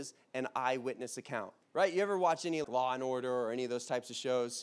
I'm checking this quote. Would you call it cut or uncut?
cut